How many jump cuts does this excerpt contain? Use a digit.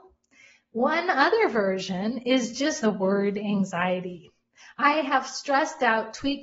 1